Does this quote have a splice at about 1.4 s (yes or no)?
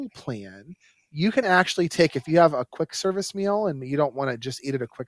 no